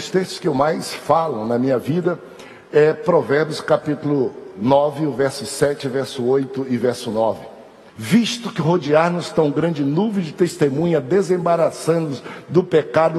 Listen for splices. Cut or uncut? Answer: cut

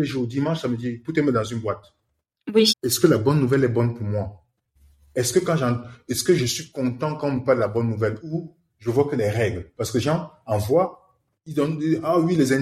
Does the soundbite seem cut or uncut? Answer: cut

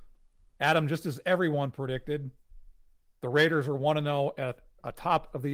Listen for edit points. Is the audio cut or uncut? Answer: uncut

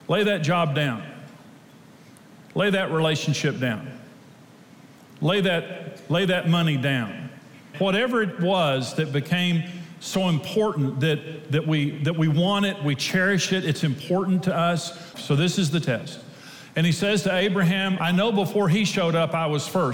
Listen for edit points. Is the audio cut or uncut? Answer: cut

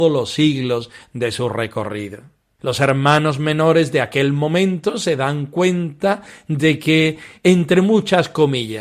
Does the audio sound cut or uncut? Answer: cut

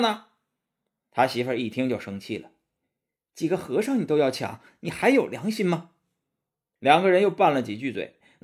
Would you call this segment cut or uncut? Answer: uncut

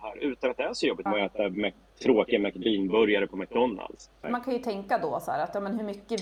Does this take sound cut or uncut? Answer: cut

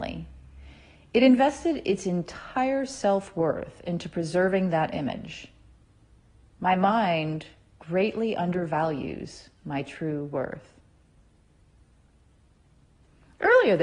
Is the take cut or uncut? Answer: uncut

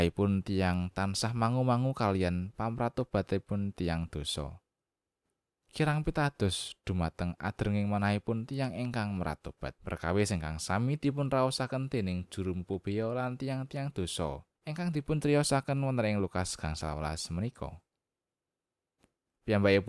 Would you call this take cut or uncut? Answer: cut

